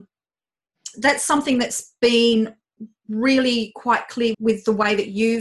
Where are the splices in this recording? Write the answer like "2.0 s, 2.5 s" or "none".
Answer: 0.9 s, 4.3 s